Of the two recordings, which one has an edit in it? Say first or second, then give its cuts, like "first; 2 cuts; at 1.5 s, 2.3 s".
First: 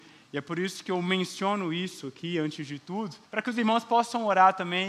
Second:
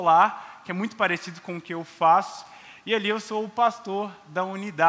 first; 1 cut; at 3.3 s